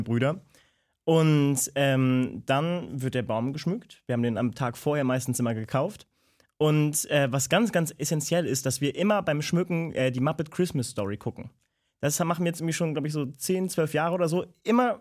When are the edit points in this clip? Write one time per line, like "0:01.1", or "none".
none